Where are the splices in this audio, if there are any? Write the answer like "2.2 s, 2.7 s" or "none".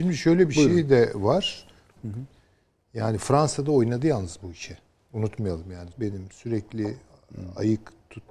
2.0 s, 5.9 s